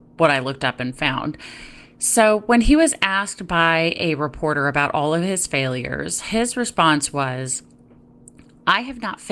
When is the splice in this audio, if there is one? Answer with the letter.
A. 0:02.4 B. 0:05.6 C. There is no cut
C